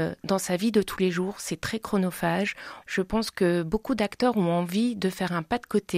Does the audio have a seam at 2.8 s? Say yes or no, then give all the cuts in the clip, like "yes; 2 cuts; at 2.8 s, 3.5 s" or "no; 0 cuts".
yes; 1 cut; at 2.8 s